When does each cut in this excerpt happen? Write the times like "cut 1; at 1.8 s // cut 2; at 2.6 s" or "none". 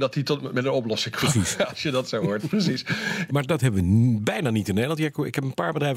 cut 1; at 3.3 s

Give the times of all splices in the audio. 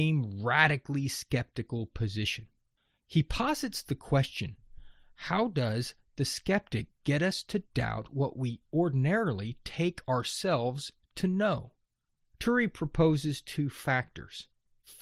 none

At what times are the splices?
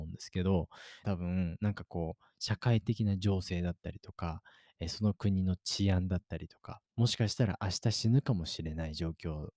cut 1; at 1.0 s // cut 2; at 6.9 s

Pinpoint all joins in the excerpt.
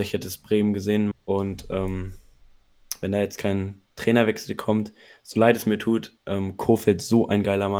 cut 1; at 1.1 s

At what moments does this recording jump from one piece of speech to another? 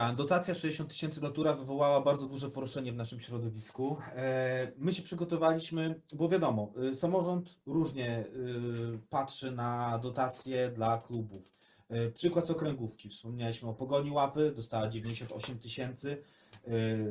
none

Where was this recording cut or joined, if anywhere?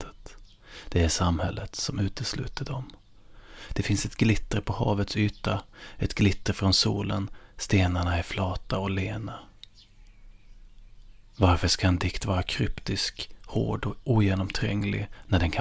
cut 1; at 3.7 s

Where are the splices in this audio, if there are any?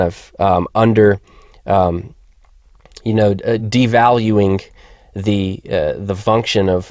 none

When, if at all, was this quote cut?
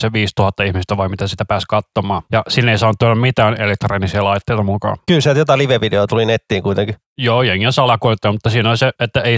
none

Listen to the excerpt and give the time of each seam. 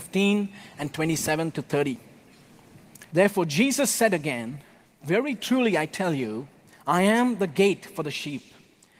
cut 1; at 3.1 s

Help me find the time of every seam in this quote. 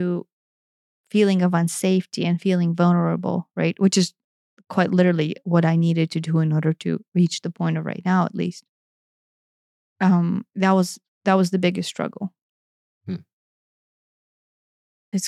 none

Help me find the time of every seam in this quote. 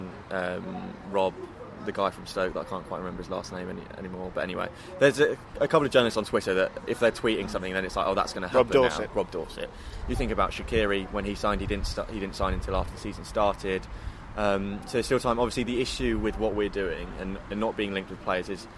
cut 1; at 10.0 s

